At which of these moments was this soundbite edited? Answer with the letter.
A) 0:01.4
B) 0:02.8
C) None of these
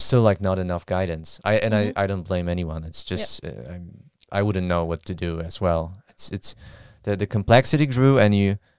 C